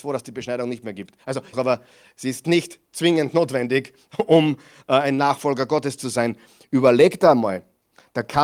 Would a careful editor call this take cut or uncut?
cut